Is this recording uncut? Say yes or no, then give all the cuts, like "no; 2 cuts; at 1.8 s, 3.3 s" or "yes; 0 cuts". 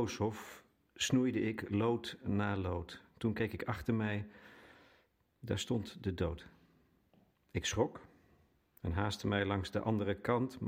yes; 0 cuts